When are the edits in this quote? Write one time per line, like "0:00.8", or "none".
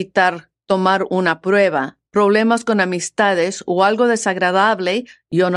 none